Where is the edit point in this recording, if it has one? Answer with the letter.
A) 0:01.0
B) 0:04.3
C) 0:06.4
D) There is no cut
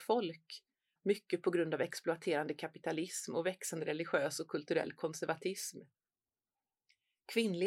A